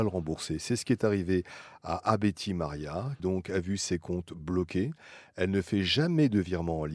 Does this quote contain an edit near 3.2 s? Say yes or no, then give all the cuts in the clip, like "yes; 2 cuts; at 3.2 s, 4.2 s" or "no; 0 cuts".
yes; 1 cut; at 3.2 s